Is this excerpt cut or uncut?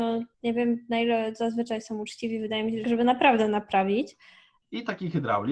cut